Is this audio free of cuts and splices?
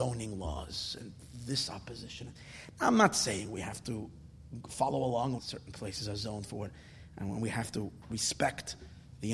no; 1 cut; at 5.4 s

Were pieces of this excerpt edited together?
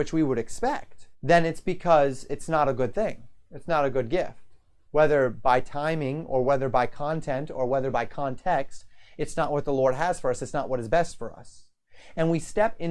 yes; 2 cuts; at 1.1 s, 4.9 s

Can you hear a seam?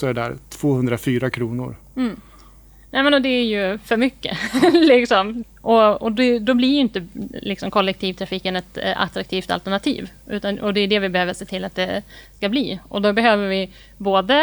no; 0 cuts

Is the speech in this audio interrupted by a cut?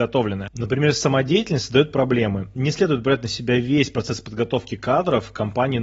no; 0 cuts

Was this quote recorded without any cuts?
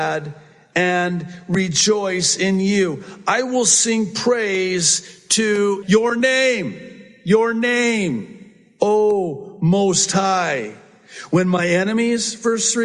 no; 1 cut; at 5.8 s

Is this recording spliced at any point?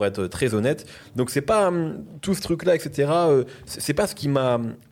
no; 0 cuts

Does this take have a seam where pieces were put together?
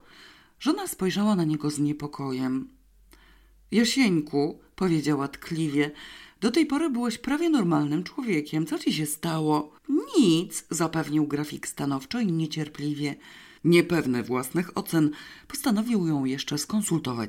yes; 2 cuts; at 9.8 s, 13.6 s

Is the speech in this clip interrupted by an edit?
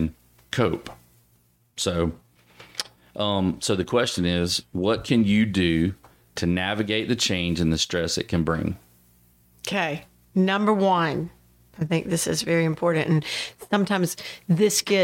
no; 0 cuts

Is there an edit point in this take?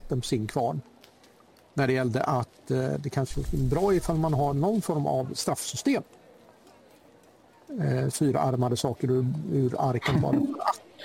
yes; 1 cut; at 8.1 s

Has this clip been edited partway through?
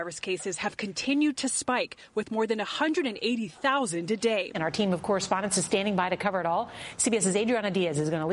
yes; 1 cut; at 4.5 s

